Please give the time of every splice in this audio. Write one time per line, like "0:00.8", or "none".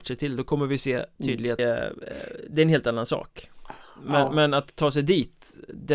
0:01.6